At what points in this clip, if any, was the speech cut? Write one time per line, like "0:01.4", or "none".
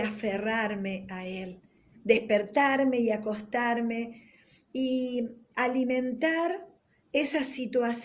0:01.9